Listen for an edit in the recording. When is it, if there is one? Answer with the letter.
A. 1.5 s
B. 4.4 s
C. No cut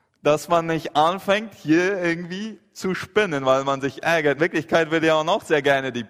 C